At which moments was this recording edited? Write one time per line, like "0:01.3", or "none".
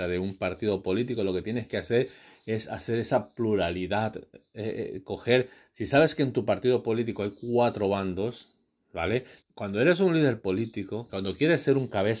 0:09.4
0:11.1